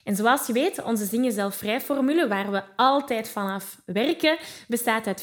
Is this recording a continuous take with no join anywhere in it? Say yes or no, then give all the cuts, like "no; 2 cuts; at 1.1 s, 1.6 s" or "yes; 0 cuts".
yes; 0 cuts